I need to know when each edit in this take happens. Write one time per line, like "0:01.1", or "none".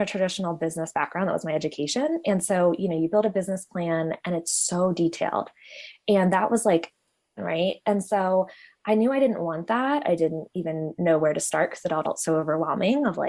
0:07.4
0:10.0
0:12.0